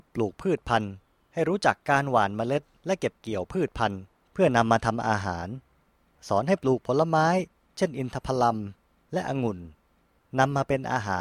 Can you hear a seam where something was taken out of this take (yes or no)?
no